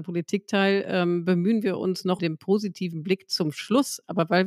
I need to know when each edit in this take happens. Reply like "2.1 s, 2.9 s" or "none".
2.2 s